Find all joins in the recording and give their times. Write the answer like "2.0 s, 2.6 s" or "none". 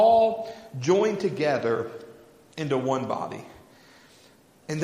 none